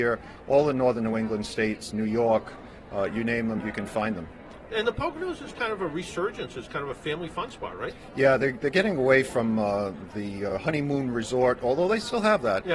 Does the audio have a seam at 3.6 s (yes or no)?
yes